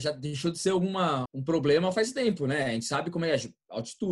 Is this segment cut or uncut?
cut